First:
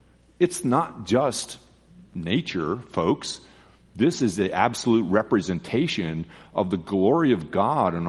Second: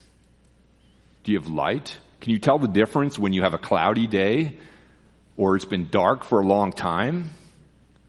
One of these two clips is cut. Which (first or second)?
second